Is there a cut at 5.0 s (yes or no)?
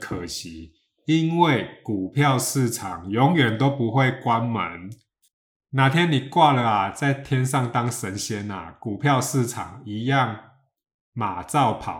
no